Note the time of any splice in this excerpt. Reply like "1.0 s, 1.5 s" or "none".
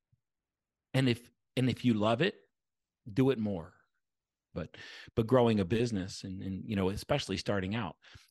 4.5 s

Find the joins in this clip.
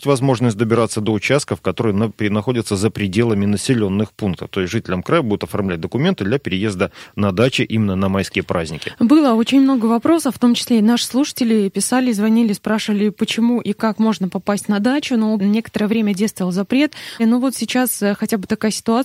15.4 s, 17.2 s

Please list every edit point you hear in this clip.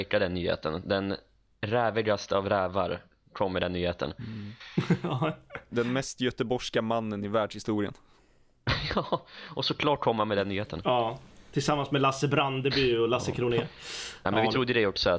none

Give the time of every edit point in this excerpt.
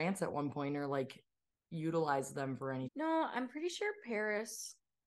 2.9 s

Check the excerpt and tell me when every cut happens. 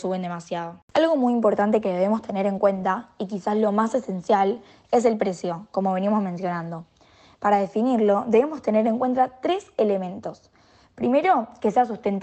none

